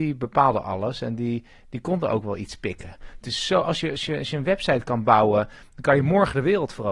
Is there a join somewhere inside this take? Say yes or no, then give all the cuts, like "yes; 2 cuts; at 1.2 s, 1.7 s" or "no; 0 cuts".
yes; 1 cut; at 3.2 s